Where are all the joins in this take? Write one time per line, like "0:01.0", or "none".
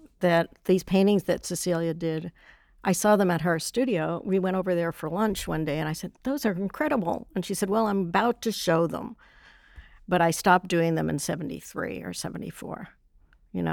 none